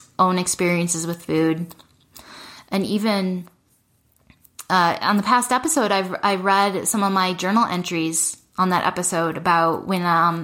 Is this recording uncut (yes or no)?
yes